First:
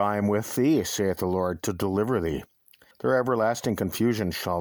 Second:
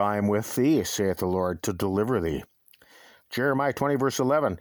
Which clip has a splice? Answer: first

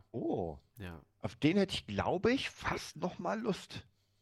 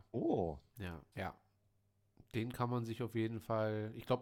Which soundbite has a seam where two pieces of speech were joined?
second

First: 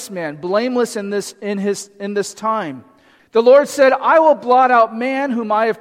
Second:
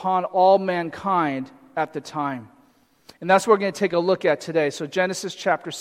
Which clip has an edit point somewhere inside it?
first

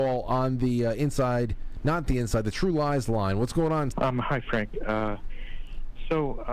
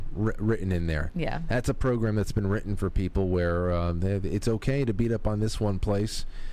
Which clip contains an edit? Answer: first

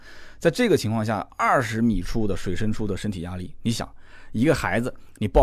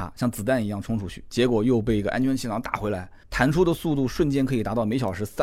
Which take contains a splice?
second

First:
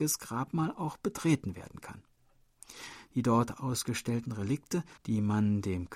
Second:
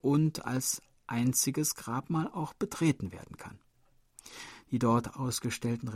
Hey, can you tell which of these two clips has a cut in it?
first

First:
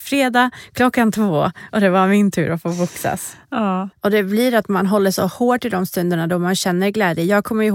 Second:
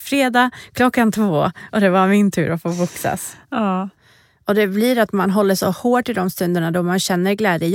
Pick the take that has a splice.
first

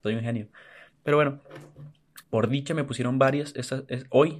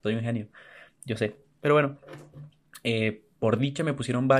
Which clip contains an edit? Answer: first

